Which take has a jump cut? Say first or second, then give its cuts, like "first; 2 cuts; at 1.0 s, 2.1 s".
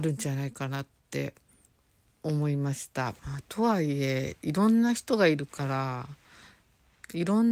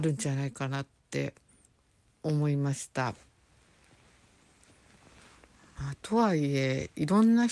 first; 1 cut; at 3.2 s